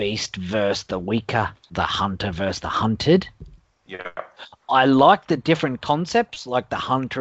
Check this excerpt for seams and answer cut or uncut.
uncut